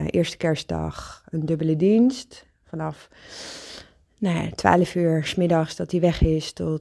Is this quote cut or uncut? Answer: uncut